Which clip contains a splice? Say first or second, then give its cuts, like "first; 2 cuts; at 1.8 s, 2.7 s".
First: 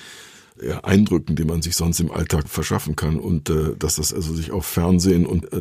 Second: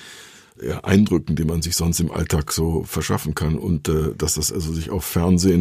first; 1 cut; at 2.4 s